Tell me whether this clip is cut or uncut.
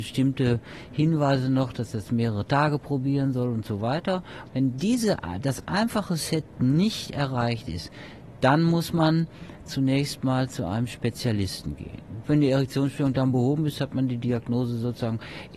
cut